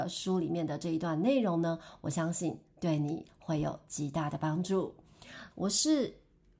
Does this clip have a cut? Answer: yes; 1 cut; at 5.5 s

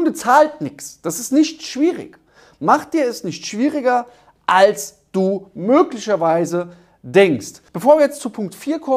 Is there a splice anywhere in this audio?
yes; 1 cut; at 7.7 s

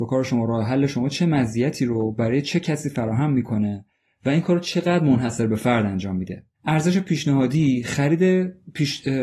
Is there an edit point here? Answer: yes; 1 cut; at 6.5 s

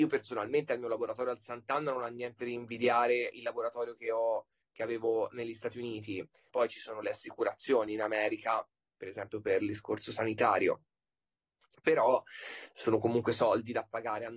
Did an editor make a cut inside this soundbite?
yes; 1 cut; at 6.5 s

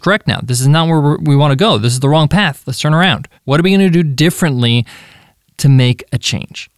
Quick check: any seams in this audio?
yes; 1 cut; at 3.4 s

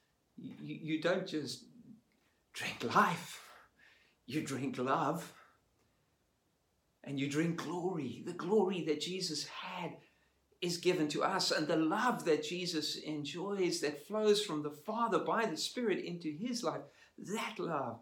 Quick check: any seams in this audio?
no; 0 cuts

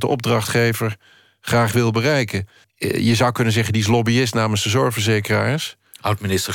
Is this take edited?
yes; 1 cut; at 2.6 s

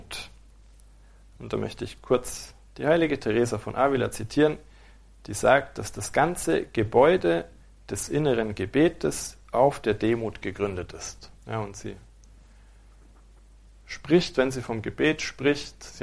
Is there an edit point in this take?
yes; 1 cut; at 11.4 s

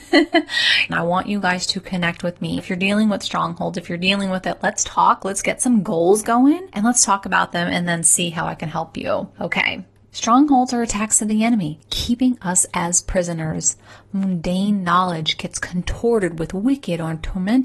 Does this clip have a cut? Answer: no; 0 cuts

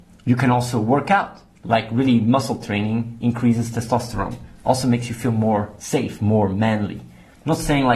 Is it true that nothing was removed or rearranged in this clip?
yes; 0 cuts

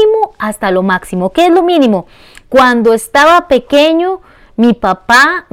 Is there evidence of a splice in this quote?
no; 0 cuts

